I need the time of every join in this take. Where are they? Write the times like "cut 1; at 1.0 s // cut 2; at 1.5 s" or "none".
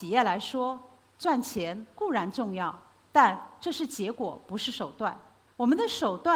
none